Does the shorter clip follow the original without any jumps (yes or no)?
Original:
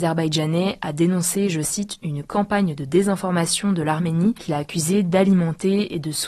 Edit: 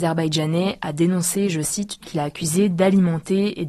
no